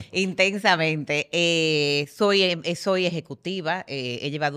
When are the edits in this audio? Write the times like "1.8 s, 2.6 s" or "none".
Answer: none